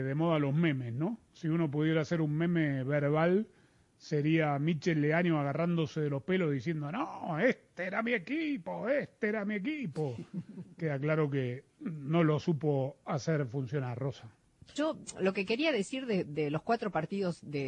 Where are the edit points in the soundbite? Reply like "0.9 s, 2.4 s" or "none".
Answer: 14.8 s